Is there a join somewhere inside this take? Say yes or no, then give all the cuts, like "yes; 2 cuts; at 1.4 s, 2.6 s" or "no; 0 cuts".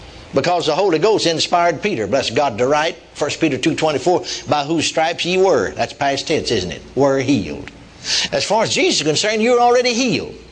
yes; 1 cut; at 8.3 s